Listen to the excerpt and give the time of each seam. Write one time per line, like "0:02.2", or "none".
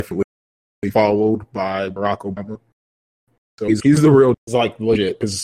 0:04.3